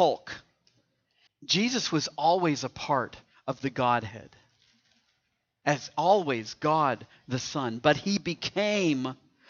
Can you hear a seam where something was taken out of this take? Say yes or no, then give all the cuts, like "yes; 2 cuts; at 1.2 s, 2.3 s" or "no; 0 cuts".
yes; 1 cut; at 1.3 s